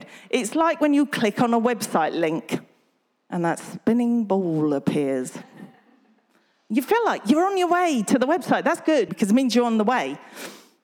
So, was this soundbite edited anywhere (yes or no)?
yes